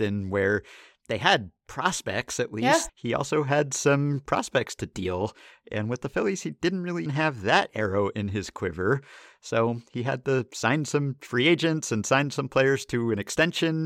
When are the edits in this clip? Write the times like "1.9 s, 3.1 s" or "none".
2.9 s, 7.1 s